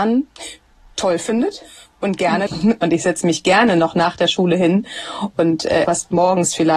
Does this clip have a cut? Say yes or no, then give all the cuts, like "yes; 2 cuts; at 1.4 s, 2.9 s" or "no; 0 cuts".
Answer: yes; 2 cuts; at 2.5 s, 5.8 s